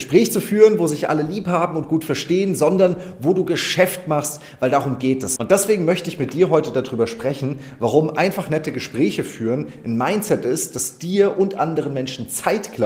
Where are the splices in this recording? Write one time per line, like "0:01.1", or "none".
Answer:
0:05.4